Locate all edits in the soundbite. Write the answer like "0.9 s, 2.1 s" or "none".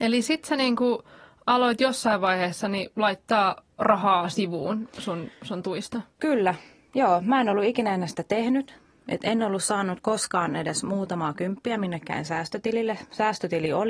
none